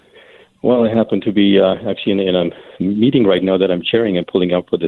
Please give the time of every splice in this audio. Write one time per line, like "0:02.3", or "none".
none